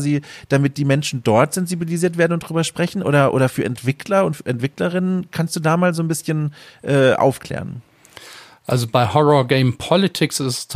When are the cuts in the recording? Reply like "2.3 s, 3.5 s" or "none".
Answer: none